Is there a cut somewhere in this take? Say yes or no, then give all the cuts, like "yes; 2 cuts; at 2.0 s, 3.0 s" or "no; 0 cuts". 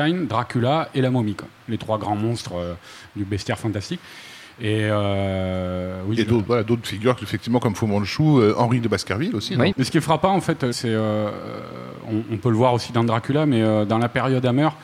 yes; 1 cut; at 9.7 s